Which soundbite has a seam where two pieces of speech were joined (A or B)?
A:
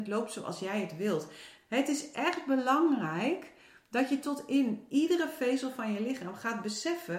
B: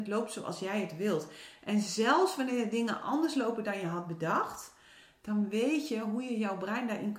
A